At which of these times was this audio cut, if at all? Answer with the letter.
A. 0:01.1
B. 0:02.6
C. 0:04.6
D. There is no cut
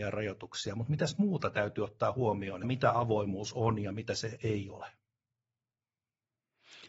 B